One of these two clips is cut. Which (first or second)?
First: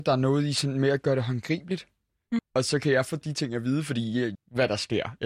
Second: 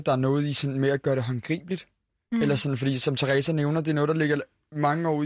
first